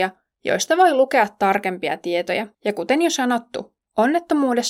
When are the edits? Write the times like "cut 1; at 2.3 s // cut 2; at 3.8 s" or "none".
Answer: cut 1; at 2.5 s